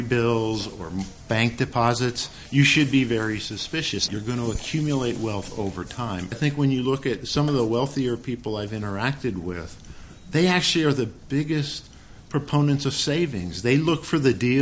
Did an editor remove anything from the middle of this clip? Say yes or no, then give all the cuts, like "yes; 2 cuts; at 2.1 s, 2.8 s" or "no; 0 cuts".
yes; 2 cuts; at 4.1 s, 6.3 s